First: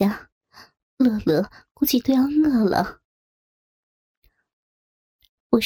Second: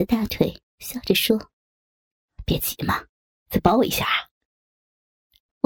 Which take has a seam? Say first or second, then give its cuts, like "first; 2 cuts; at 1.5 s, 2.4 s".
first; 1 cut; at 4.6 s